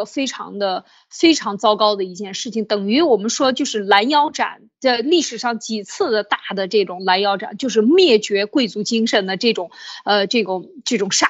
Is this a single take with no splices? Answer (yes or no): yes